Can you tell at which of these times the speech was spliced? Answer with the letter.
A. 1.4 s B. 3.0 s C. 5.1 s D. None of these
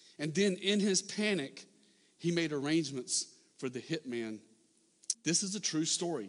C